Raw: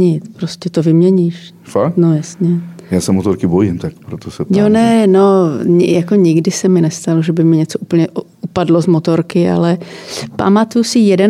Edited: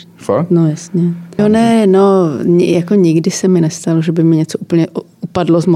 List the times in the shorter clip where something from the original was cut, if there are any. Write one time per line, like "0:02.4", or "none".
0:01.4